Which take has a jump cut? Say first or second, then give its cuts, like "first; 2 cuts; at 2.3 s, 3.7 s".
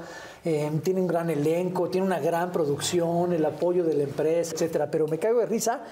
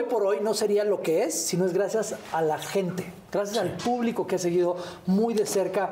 first; 1 cut; at 4.5 s